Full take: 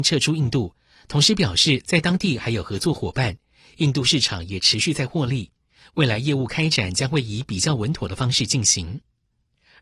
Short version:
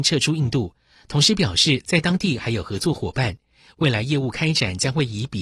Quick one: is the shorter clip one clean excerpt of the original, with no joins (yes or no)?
no